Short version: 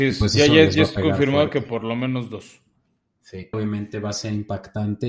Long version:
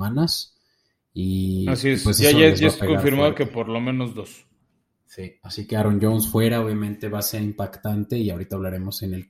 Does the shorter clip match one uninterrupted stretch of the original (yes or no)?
no